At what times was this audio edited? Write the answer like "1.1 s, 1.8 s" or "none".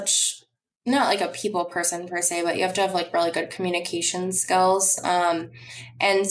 none